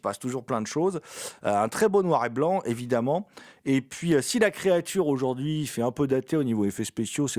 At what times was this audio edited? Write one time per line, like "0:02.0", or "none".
none